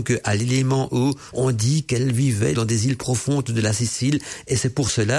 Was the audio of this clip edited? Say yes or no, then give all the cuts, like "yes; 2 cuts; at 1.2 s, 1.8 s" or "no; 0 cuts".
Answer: yes; 2 cuts; at 1.3 s, 2.5 s